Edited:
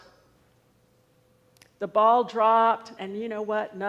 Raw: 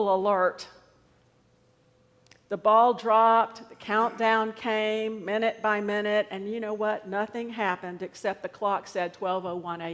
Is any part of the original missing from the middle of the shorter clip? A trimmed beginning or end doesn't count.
yes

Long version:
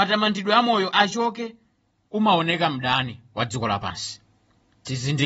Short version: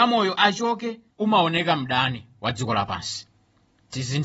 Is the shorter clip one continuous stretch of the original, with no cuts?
no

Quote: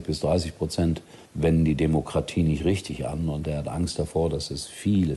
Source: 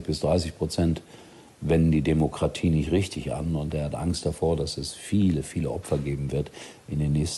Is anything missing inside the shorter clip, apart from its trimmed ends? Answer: yes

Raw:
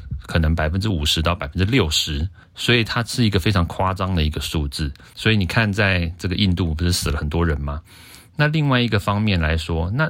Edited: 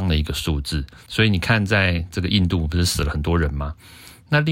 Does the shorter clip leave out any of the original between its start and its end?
no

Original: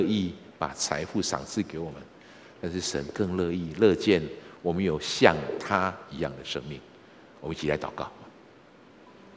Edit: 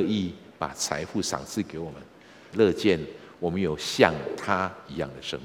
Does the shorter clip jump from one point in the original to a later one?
yes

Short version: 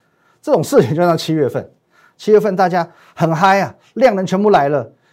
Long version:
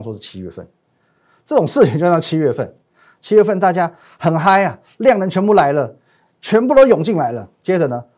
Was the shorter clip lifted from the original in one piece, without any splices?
yes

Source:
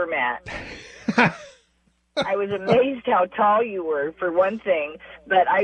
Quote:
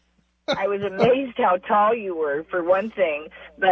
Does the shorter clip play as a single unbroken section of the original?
yes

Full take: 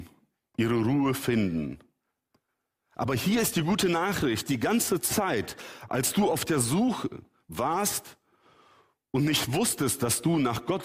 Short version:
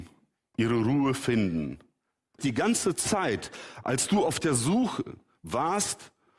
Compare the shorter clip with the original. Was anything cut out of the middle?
yes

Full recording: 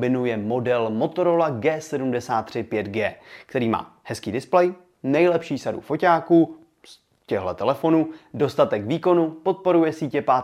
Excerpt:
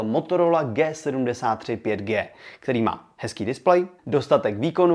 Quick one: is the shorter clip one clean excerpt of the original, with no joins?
no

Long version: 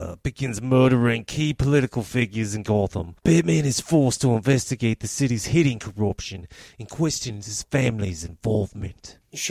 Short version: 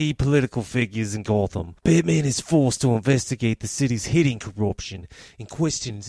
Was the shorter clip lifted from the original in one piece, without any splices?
yes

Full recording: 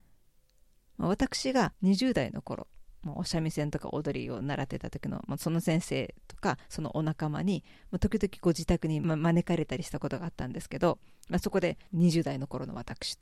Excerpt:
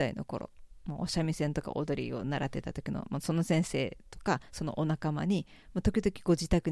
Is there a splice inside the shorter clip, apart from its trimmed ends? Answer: no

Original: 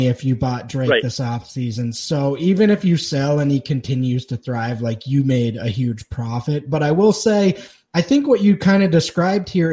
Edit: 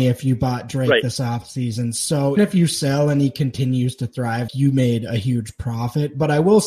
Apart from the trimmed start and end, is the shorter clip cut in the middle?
yes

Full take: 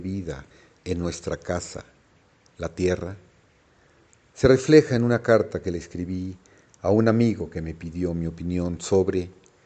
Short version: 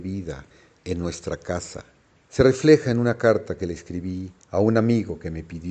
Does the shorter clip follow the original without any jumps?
no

